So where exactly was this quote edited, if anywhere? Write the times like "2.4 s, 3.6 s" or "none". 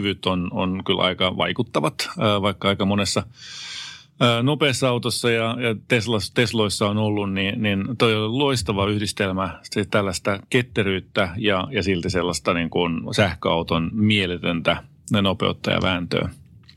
none